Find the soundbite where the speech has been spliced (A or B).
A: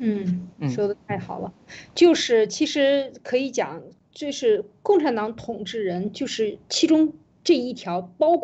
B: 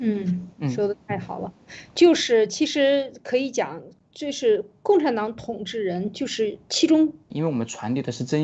B